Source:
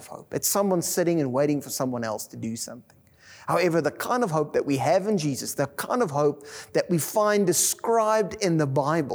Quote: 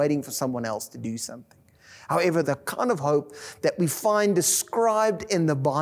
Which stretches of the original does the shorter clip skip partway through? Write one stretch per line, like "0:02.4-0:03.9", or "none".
0:03.8-0:05.5